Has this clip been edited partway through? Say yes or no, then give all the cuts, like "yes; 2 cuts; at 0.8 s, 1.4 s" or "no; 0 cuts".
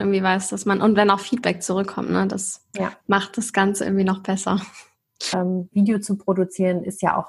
yes; 2 cuts; at 3.0 s, 5.3 s